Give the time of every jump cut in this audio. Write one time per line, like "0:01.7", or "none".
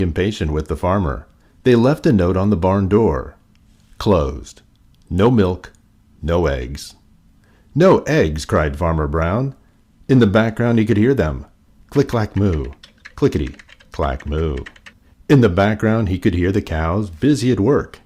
0:13.1
0:15.1